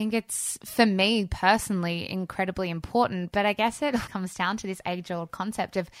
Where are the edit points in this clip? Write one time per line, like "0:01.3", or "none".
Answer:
0:04.1